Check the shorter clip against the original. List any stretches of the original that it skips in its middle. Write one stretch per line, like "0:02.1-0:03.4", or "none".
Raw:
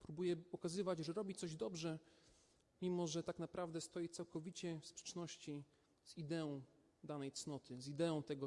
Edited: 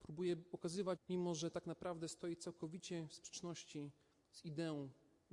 0:01.0-0:02.7